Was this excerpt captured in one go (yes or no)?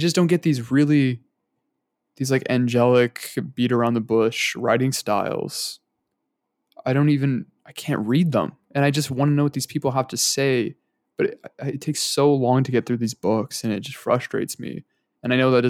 yes